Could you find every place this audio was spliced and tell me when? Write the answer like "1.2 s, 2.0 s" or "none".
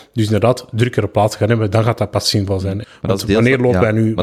2.8 s